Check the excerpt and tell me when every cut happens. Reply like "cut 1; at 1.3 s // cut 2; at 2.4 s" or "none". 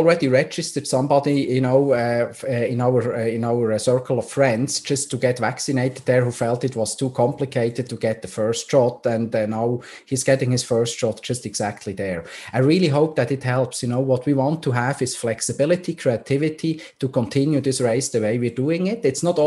none